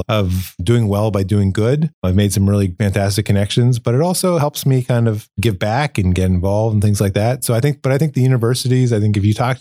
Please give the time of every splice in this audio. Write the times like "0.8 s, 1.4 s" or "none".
none